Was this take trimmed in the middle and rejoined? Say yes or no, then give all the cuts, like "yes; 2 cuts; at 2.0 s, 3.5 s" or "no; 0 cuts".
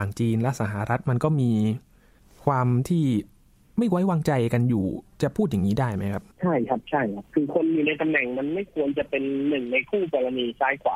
yes; 1 cut; at 6.3 s